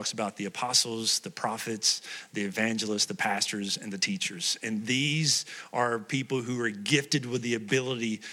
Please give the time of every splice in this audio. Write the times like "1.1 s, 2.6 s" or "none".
none